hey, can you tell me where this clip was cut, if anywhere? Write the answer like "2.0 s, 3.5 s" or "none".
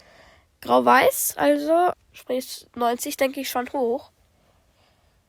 1.9 s